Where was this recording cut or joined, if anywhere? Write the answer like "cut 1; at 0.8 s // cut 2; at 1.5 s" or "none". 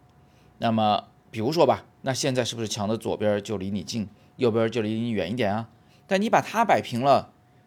cut 1; at 2.0 s // cut 2; at 5.9 s